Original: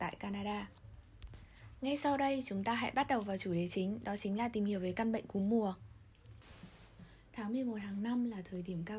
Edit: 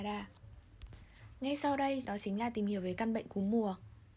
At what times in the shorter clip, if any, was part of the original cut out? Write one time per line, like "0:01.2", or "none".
0:02.0